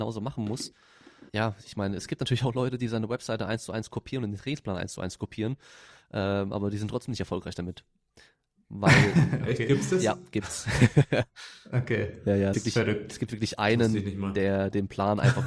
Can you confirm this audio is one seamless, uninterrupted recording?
no; 2 cuts; at 1.3 s, 12.5 s

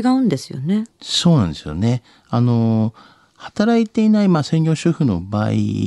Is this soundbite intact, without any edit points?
yes; 0 cuts

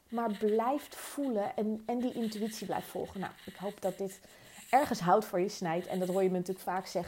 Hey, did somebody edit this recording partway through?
no; 0 cuts

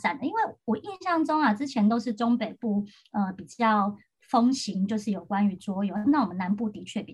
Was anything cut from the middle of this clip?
no; 0 cuts

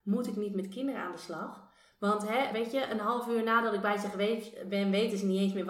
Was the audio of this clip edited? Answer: no; 0 cuts

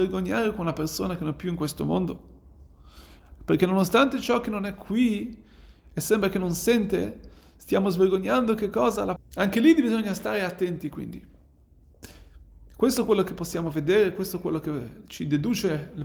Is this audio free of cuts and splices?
no; 1 cut; at 9.2 s

